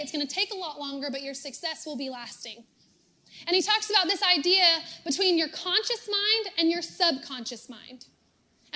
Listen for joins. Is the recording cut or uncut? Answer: uncut